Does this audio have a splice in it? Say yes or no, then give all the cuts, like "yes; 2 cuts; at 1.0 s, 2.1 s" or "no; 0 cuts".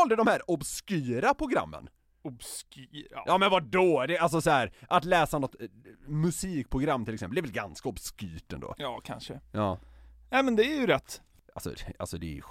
no; 0 cuts